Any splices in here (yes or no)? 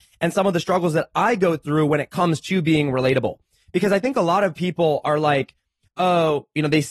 no